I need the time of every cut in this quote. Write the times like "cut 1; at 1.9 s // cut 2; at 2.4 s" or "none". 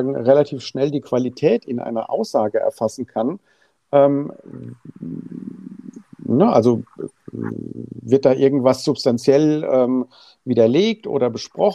none